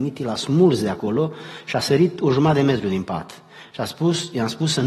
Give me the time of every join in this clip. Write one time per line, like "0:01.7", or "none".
none